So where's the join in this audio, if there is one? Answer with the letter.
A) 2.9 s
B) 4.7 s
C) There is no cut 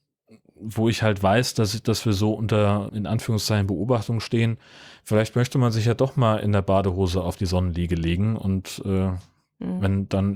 A